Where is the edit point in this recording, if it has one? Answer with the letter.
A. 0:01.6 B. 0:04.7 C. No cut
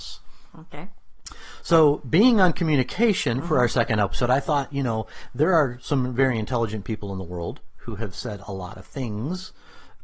C